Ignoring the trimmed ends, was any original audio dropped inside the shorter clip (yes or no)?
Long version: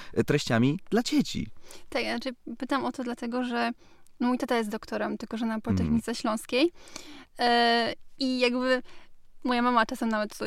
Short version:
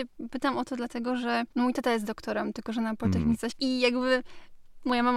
yes